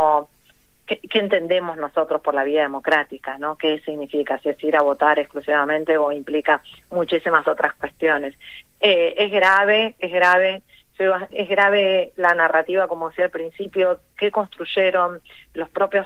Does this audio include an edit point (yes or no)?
yes